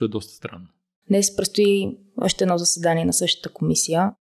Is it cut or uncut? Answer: cut